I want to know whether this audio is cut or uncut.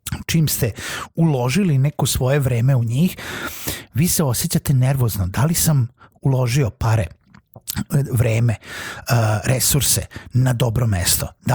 uncut